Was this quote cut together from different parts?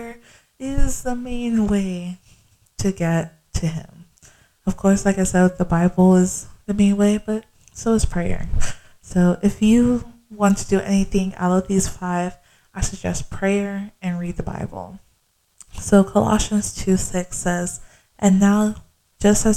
no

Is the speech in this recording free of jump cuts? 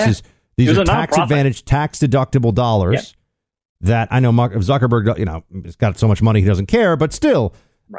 yes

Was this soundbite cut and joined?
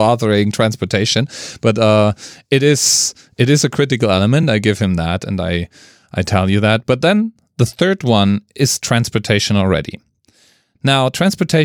no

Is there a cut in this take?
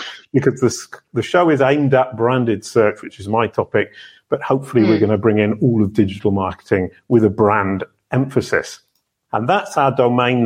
yes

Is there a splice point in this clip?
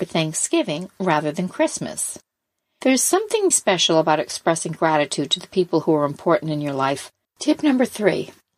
yes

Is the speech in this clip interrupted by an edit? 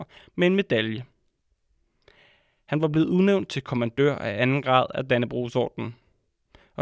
no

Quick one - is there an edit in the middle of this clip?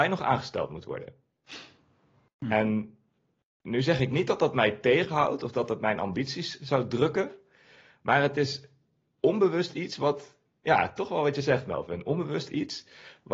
no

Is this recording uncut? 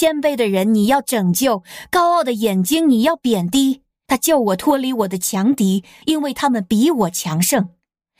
no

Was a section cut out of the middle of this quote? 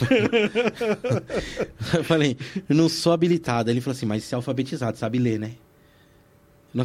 no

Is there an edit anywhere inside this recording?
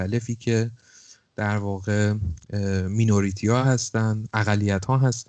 no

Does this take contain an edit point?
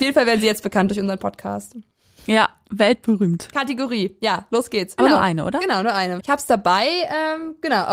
yes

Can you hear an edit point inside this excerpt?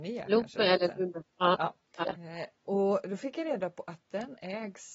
yes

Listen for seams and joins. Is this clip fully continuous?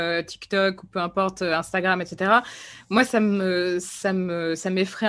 yes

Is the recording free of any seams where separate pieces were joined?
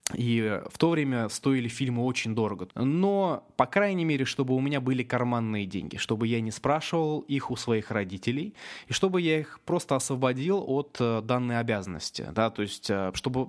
no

